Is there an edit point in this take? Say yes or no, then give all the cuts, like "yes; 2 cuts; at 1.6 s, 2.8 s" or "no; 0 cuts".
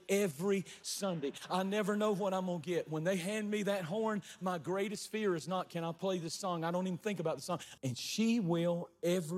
yes; 1 cut; at 7.8 s